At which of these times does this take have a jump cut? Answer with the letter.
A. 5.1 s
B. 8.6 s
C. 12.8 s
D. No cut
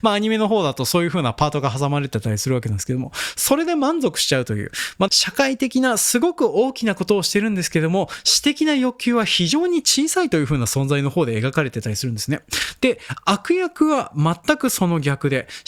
A